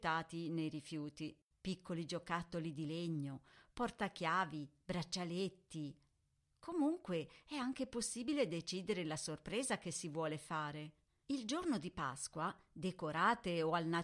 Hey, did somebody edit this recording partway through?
yes; 2 cuts; at 1.5 s, 11.2 s

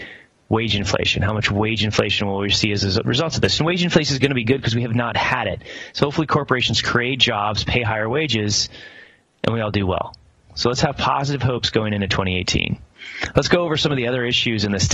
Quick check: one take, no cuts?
yes; 0 cuts

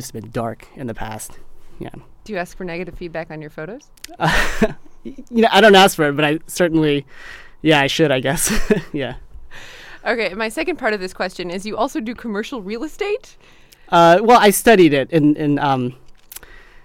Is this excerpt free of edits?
yes; 0 cuts

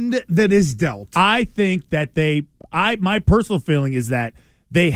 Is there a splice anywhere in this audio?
no; 0 cuts

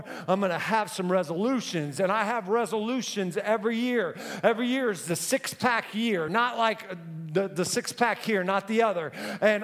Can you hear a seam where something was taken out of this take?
no; 0 cuts

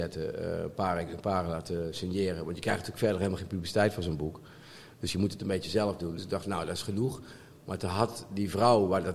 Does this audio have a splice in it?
no; 0 cuts

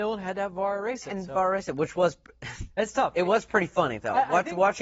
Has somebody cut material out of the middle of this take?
no; 0 cuts

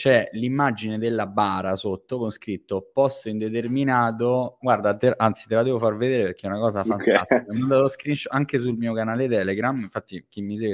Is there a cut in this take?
yes; 1 cut; at 4.6 s

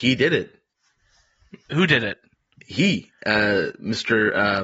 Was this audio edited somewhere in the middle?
no; 0 cuts

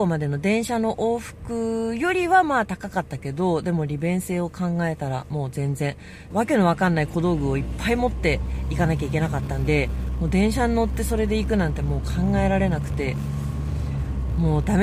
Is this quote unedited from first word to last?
no; 1 cut; at 6.3 s

